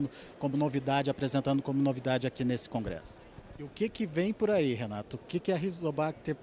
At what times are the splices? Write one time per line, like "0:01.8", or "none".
0:03.5